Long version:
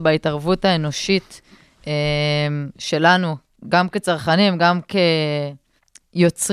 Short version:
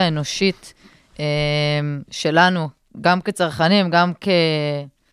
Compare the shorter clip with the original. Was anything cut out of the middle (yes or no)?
no